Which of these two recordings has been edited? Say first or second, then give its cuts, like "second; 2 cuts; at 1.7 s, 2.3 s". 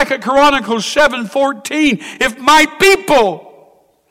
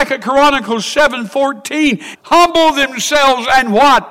second; 1 cut; at 2.1 s